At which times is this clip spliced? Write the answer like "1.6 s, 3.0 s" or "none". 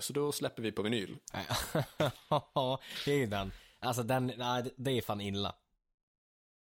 none